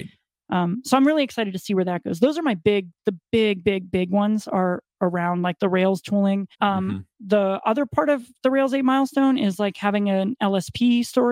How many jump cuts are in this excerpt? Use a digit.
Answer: 1